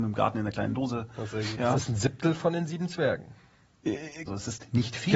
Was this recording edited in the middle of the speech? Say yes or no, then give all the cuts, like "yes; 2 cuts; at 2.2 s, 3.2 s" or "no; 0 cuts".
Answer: yes; 2 cuts; at 1.6 s, 4.3 s